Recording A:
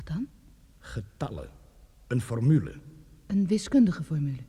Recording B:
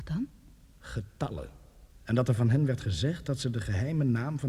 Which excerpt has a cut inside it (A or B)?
B